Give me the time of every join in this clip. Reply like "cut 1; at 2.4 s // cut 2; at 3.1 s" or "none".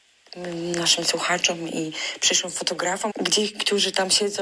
cut 1; at 3.1 s